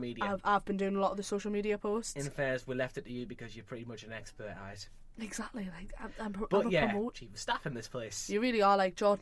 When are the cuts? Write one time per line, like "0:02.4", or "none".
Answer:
0:07.1